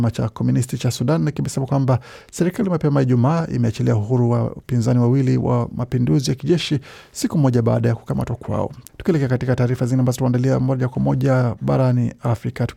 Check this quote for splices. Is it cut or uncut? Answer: cut